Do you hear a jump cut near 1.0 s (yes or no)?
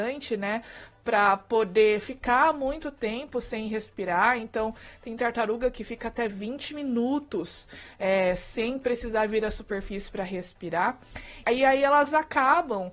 no